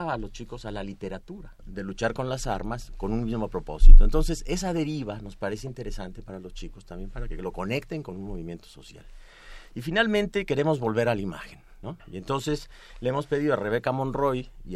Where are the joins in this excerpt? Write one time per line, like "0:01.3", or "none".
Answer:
0:01.6